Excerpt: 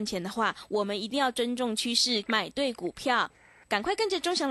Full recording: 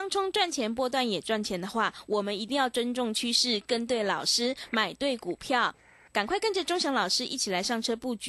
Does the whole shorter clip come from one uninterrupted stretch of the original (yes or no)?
no